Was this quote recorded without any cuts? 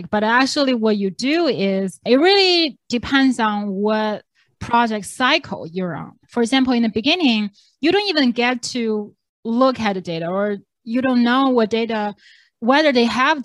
yes; 0 cuts

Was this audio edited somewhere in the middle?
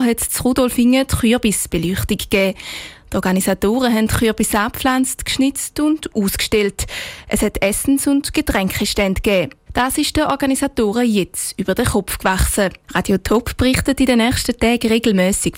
yes; 2 cuts; at 9.7 s, 12.8 s

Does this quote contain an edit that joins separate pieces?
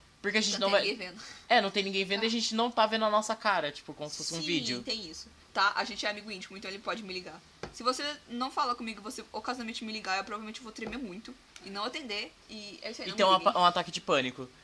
yes; 2 cuts; at 5.4 s, 12.4 s

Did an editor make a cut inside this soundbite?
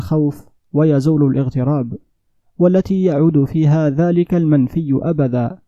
no; 0 cuts

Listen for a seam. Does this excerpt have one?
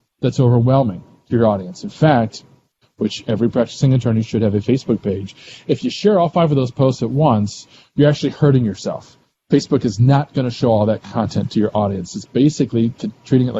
yes; 1 cut; at 2.8 s

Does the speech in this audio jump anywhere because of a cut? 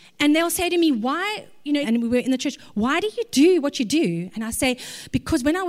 yes; 1 cut; at 1.8 s

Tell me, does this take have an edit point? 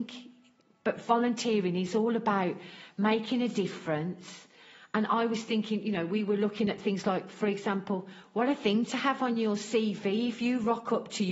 no; 0 cuts

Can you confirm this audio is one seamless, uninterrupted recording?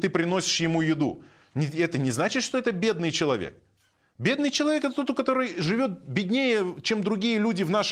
yes; 0 cuts

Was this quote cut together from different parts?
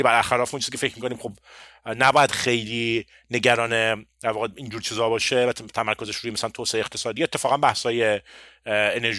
no; 0 cuts

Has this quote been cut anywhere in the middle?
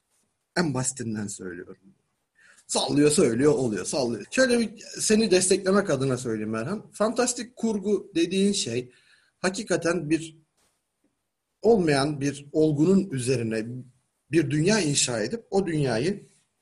yes; 1 cut; at 4.2 s

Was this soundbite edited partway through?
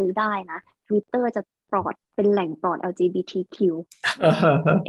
yes; 1 cut; at 2.0 s

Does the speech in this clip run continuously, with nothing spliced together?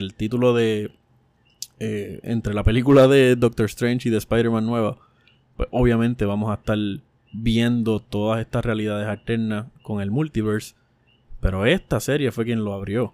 yes; 0 cuts

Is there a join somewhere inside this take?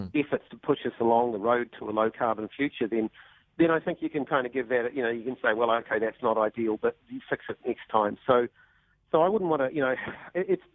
no; 0 cuts

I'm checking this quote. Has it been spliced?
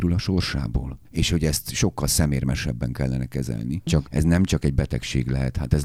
yes; 2 cuts; at 1.0 s, 3.9 s

